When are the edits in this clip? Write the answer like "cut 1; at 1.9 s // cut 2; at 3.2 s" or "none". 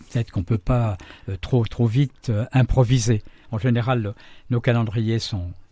cut 1; at 3.4 s